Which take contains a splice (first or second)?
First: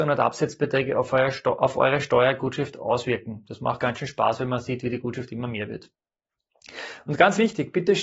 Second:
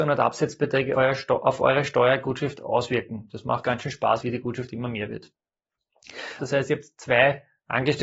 second